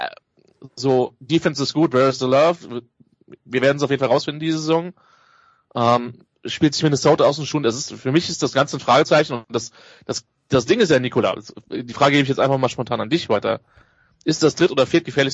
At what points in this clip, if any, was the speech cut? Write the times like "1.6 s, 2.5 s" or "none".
none